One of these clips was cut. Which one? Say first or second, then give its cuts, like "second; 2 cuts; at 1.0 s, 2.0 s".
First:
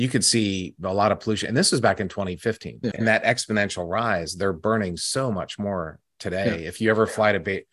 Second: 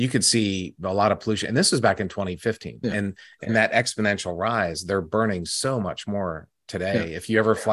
first; 1 cut; at 2.9 s